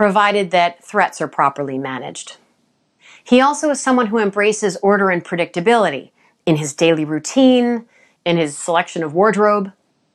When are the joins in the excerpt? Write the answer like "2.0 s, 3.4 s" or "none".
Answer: 8.2 s